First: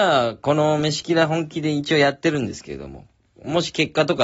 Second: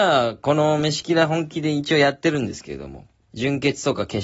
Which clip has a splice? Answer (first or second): second